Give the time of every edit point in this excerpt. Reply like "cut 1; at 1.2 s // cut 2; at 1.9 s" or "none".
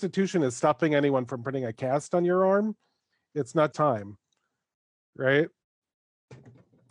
cut 1; at 3.7 s // cut 2; at 5.6 s